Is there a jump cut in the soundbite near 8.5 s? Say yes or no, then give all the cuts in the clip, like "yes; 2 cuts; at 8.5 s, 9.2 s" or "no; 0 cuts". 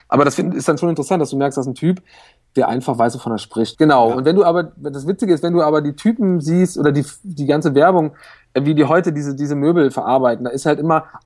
no; 1 cut; at 3.7 s